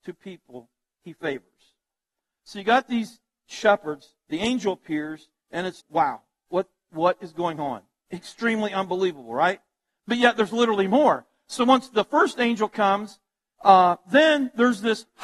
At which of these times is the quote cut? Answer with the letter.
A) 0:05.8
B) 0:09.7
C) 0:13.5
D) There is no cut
A